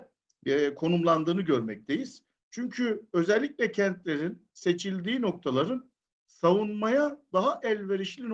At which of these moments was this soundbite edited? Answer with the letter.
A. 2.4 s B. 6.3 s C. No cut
A